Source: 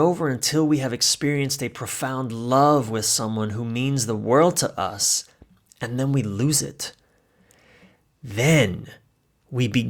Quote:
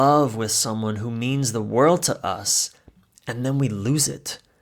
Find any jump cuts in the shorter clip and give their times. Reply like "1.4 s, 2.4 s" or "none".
none